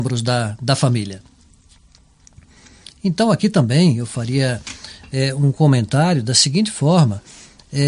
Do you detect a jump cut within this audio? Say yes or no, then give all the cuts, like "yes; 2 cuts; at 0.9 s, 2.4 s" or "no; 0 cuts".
no; 0 cuts